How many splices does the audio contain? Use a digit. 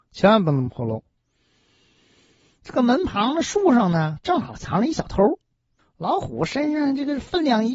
1